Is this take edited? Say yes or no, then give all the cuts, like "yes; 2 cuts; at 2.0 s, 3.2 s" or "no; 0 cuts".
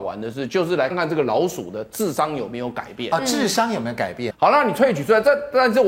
yes; 2 cuts; at 0.9 s, 4.3 s